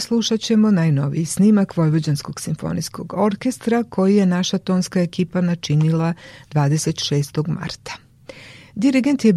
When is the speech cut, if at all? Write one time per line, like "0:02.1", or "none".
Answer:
none